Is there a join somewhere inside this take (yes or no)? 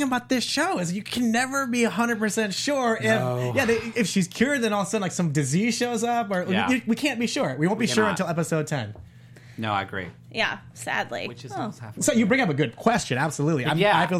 no